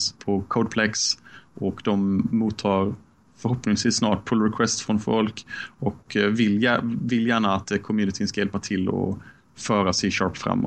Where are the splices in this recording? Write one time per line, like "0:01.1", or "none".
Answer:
none

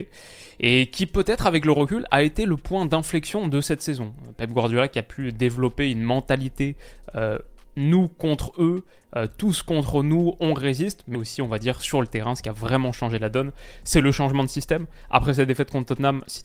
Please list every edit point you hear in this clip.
0:11.1

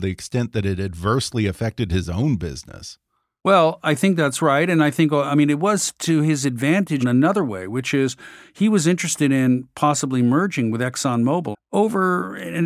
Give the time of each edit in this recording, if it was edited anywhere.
0:07.0
0:11.5

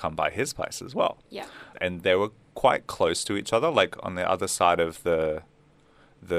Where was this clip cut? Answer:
0:01.7

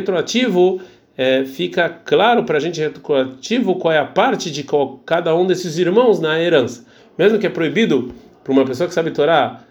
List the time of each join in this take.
0:07.0

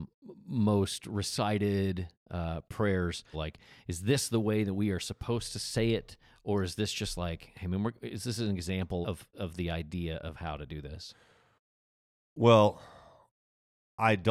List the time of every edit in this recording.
0:02.2
0:03.3
0:09.0

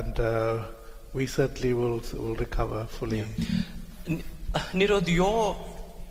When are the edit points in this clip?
none

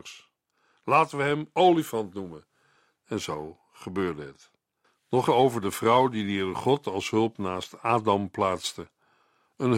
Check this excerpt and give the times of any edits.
0:05.3

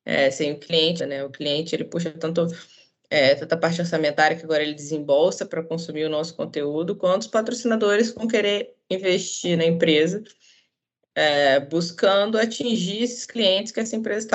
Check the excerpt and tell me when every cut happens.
0:01.0

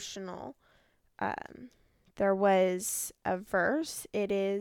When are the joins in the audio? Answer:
none

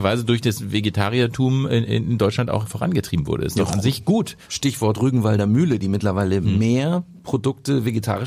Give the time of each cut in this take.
0:04.4

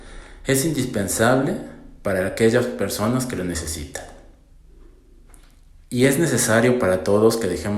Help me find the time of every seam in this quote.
none

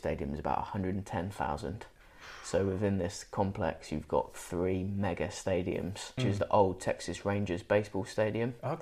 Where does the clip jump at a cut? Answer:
0:06.2

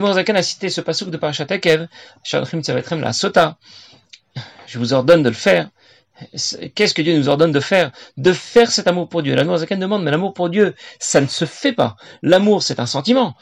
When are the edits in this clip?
none

